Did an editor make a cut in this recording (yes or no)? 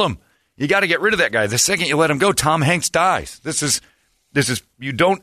no